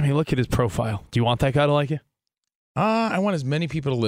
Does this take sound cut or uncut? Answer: uncut